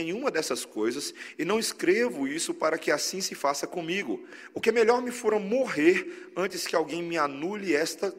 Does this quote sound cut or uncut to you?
uncut